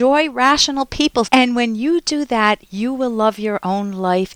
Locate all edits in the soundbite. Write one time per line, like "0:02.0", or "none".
0:01.2